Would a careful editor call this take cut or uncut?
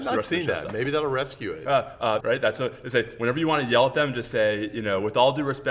cut